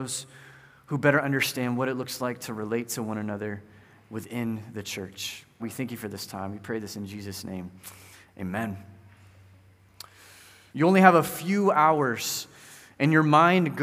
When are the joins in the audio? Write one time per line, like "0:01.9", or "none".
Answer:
0:05.6
0:10.7